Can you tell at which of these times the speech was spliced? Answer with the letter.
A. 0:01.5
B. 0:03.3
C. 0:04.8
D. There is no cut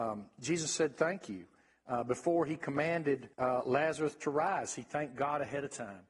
B